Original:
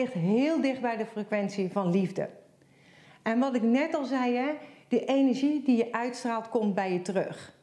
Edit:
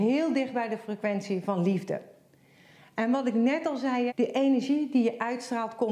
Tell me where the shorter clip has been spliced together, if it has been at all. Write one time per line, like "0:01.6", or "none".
0:04.1